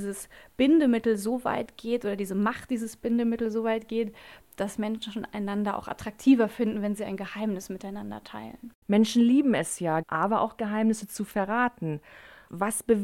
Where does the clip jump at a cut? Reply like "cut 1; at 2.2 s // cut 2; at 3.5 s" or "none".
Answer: cut 1; at 8.8 s // cut 2; at 10.0 s